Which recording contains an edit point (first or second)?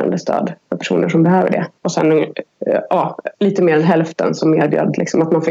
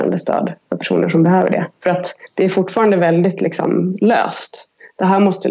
first